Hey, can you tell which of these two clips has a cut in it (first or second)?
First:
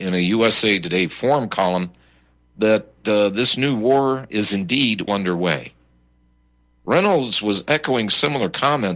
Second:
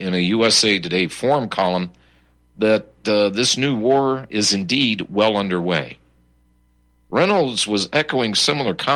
first